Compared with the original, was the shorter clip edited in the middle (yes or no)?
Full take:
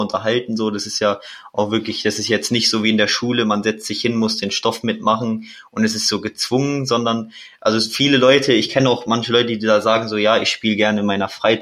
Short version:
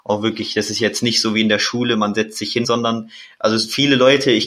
yes